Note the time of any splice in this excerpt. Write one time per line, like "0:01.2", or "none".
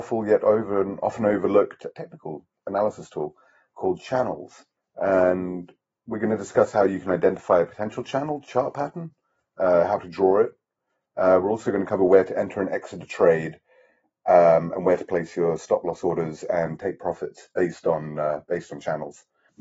0:01.9